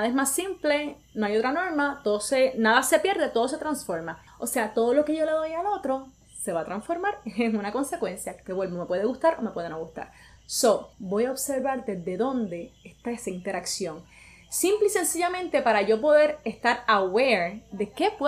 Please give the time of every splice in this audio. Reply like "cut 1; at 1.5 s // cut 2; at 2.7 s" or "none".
cut 1; at 4.3 s // cut 2; at 10.9 s